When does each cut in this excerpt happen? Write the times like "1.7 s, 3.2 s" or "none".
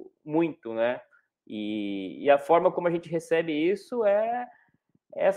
1.3 s